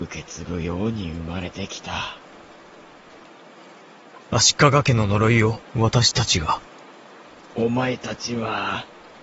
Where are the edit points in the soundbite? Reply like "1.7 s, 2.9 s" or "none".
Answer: 4.2 s, 5.7 s